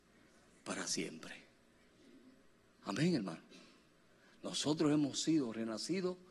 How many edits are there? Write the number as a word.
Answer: zero